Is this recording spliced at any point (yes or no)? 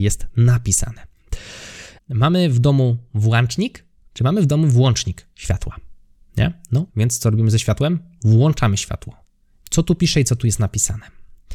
yes